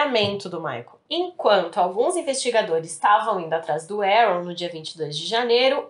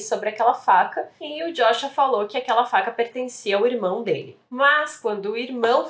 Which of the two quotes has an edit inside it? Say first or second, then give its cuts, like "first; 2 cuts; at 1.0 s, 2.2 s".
first; 1 cut; at 1.1 s